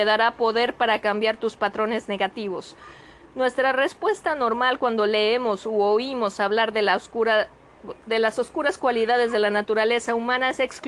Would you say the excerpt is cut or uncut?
uncut